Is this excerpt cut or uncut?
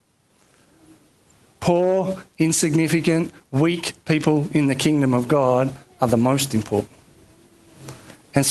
uncut